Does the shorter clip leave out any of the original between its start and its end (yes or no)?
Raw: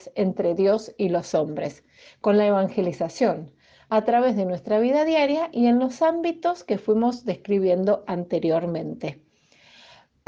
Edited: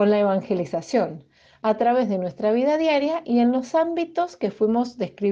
no